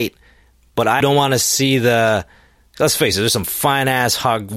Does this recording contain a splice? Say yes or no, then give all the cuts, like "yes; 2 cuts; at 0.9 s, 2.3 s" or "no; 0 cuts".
yes; 1 cut; at 1.0 s